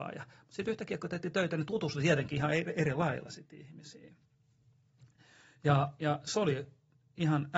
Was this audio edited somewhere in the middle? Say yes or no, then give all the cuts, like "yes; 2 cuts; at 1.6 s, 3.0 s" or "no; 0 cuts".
no; 0 cuts